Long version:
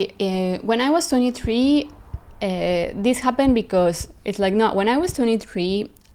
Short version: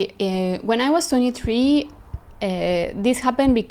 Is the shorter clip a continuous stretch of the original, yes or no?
yes